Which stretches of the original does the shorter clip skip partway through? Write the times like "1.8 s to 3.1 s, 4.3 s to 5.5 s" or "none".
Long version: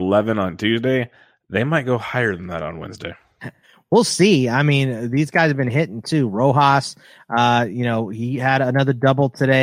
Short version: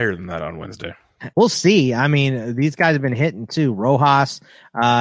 3.5 s to 3.9 s